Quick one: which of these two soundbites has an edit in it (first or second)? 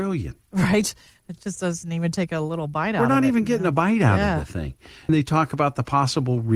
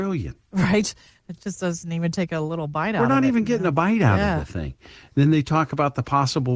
first